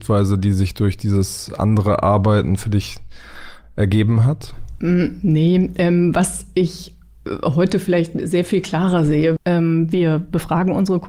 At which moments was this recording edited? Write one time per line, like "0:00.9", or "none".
0:09.4